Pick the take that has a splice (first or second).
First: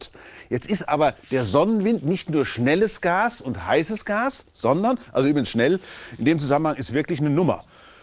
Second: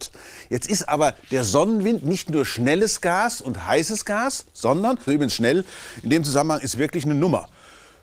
second